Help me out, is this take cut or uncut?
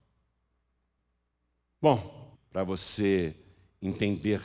cut